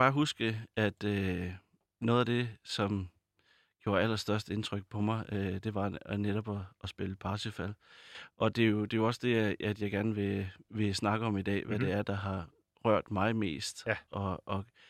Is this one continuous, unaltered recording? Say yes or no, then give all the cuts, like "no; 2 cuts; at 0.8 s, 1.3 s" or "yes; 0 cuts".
yes; 0 cuts